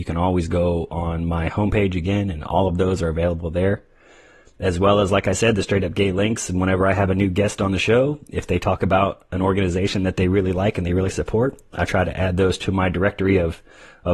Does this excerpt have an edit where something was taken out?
no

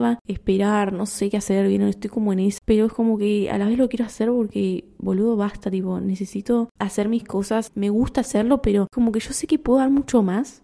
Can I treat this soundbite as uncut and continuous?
no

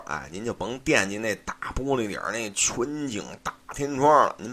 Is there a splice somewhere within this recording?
no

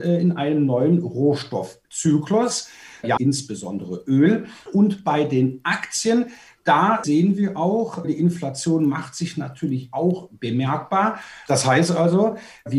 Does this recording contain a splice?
yes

